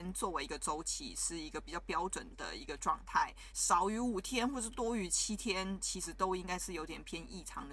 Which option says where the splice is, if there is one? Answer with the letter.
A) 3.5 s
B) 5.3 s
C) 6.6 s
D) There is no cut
A